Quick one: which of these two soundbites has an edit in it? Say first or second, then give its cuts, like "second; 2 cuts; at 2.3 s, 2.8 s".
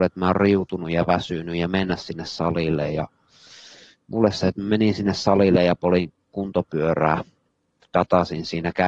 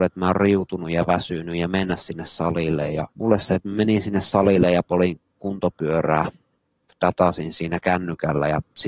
second; 1 cut; at 3.1 s